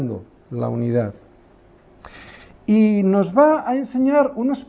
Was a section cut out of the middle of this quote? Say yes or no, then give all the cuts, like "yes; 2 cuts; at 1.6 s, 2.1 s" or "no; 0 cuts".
no; 0 cuts